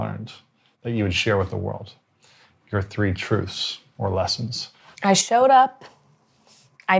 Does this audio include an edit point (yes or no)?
yes